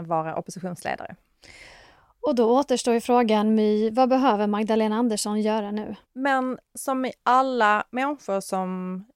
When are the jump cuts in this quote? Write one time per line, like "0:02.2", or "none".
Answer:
0:06.0